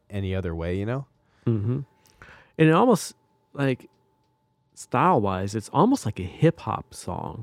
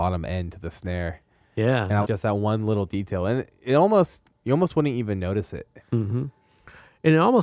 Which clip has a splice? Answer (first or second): second